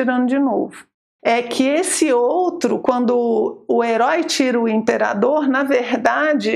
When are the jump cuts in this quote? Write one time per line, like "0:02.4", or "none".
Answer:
0:01.2

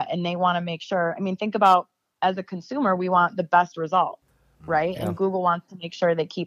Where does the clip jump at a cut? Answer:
none

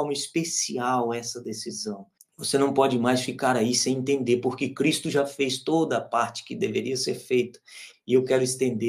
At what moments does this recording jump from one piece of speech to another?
0:02.2
0:07.9

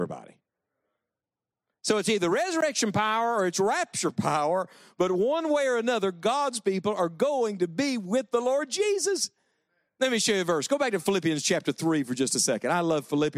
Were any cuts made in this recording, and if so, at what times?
none

